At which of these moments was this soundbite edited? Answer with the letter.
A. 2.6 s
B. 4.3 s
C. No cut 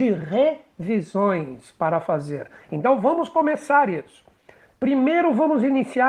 C